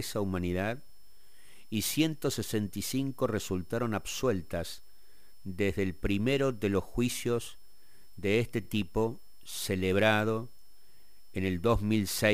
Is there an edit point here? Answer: no; 0 cuts

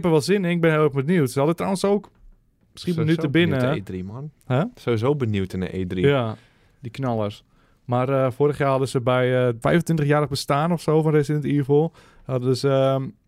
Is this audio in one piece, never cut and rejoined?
no; 1 cut; at 9.6 s

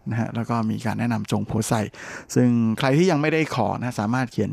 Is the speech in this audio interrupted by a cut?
no; 0 cuts

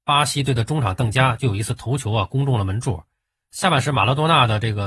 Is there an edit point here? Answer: no; 0 cuts

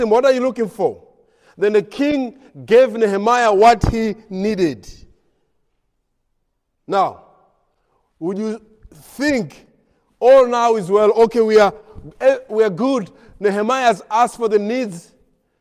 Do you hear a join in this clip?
no; 0 cuts

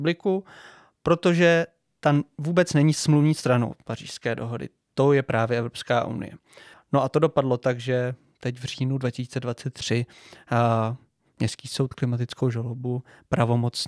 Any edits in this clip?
yes; 1 cut; at 6.7 s

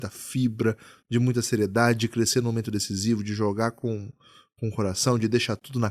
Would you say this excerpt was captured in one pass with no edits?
yes; 0 cuts

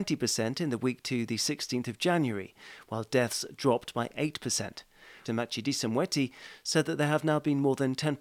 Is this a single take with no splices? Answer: no; 1 cut; at 5.2 s

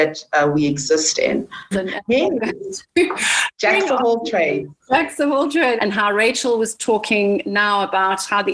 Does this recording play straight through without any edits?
no; 2 cuts; at 1.7 s, 5.8 s

